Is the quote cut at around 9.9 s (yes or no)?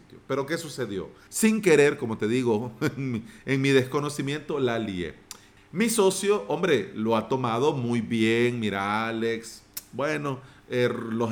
no